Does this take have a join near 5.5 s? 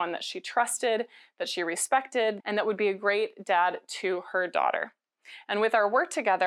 no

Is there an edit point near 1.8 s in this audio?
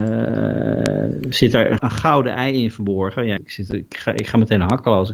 yes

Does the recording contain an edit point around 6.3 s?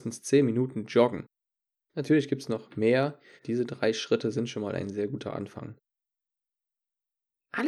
no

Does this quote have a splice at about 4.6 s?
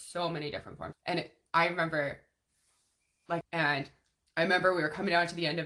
no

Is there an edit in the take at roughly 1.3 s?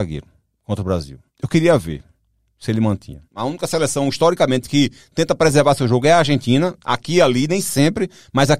yes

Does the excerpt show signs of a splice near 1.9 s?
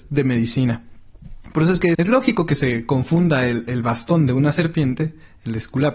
yes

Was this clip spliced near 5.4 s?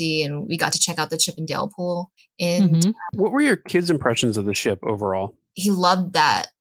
no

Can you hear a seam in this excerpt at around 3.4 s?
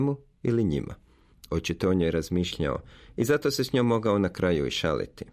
no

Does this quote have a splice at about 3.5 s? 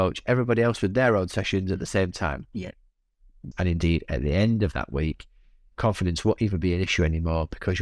yes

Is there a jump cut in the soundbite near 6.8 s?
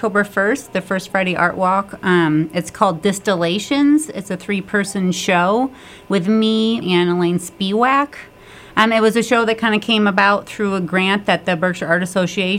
yes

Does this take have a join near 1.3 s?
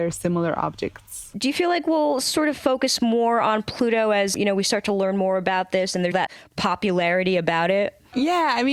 yes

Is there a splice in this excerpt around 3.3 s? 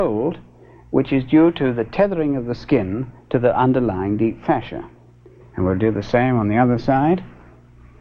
no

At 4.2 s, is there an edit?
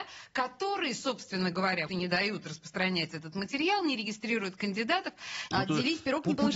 no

